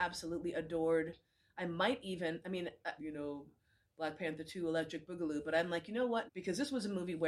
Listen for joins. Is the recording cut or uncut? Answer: cut